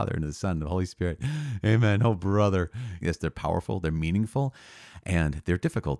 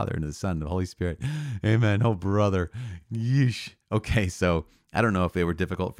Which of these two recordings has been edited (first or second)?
first